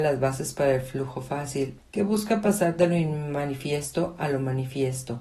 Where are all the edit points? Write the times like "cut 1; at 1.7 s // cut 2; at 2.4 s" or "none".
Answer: cut 1; at 1.8 s

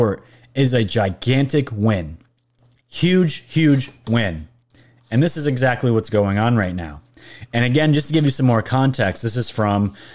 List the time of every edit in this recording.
cut 1; at 2.8 s

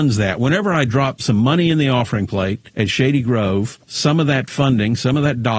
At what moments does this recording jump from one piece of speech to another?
none

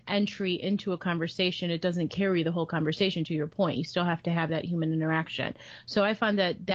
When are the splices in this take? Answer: none

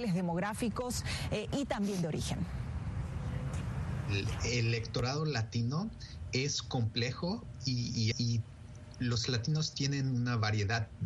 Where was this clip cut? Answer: cut 1; at 8.1 s

